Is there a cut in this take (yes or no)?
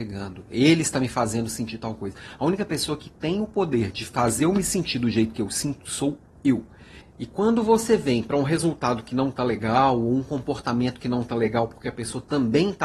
yes